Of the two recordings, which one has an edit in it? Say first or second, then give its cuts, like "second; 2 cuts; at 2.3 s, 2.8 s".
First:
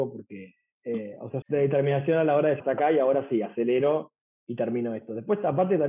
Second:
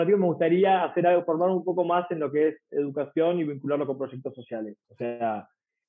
first; 2 cuts; at 1.4 s, 2.6 s